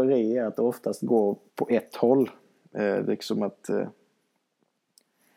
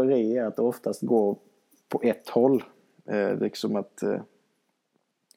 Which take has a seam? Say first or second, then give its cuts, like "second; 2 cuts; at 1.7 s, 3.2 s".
first; 1 cut; at 1.5 s